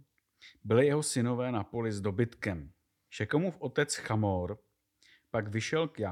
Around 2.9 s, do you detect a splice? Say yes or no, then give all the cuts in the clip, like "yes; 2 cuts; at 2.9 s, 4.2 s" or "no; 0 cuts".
yes; 1 cut; at 2.9 s